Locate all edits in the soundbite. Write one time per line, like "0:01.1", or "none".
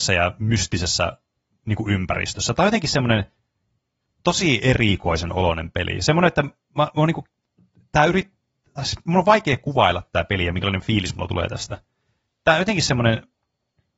none